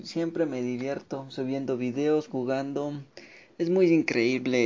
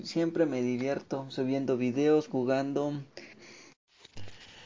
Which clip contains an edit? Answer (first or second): second